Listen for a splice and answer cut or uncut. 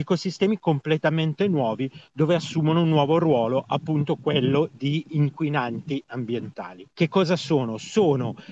cut